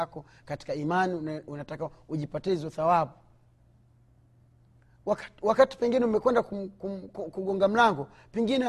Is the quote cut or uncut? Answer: uncut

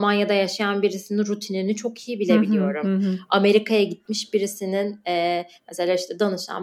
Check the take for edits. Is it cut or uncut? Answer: uncut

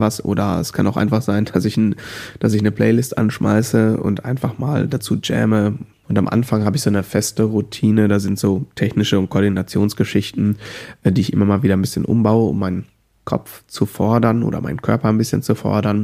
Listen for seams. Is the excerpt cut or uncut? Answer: cut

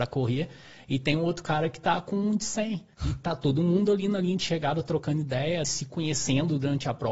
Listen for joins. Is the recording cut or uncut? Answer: cut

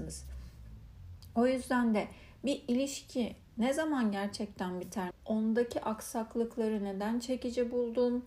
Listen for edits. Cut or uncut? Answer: cut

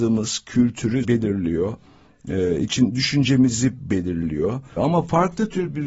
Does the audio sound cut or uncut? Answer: cut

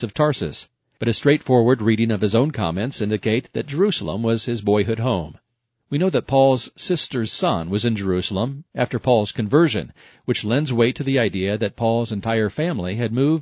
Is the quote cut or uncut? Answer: uncut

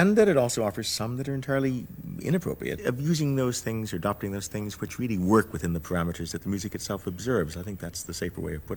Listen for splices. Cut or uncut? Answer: cut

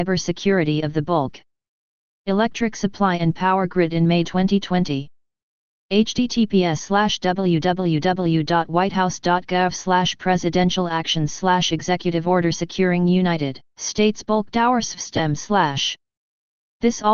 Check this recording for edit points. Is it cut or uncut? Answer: cut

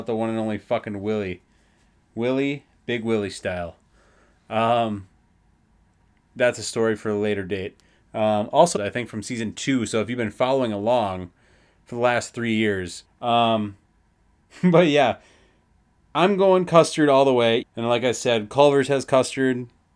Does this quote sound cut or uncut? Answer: cut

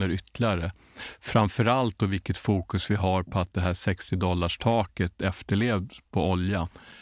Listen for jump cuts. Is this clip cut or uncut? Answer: uncut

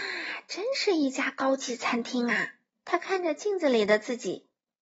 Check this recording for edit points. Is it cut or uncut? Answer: cut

